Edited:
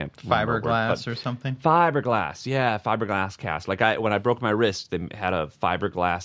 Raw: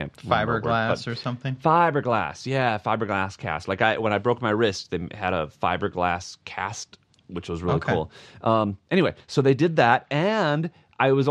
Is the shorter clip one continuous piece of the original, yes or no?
yes